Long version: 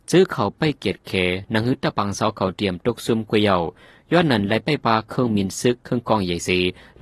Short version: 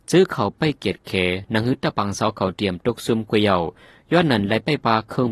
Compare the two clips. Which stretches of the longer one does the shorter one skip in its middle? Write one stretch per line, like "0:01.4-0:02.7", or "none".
none

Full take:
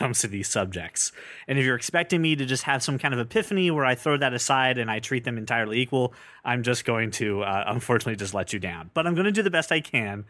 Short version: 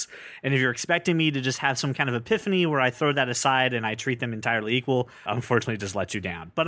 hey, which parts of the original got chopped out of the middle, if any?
0:06.3-0:07.6

